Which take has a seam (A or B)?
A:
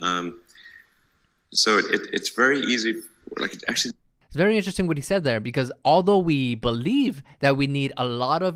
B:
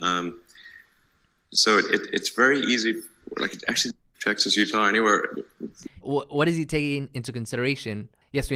B